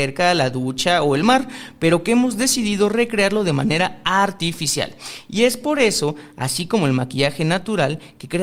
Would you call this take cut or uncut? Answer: uncut